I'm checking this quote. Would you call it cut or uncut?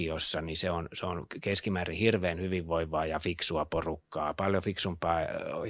uncut